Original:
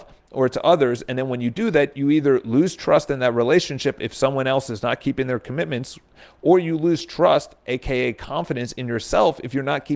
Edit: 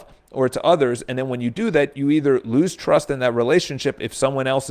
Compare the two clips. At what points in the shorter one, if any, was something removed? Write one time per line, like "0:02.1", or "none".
none